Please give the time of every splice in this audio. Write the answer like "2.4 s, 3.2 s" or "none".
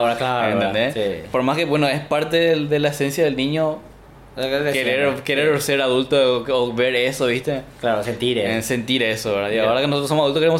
none